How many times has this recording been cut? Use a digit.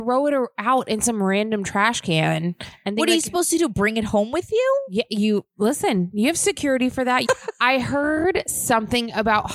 1